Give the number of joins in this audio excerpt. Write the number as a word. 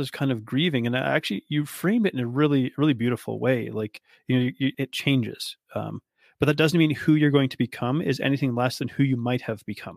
one